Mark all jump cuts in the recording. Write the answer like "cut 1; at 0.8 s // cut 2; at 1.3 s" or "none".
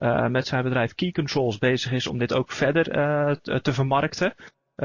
none